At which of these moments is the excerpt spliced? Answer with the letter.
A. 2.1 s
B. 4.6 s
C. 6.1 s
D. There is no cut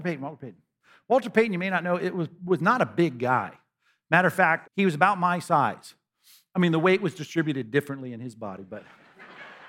B